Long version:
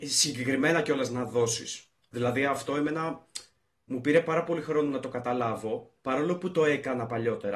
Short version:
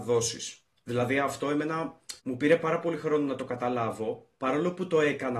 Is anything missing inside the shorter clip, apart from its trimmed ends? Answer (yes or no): yes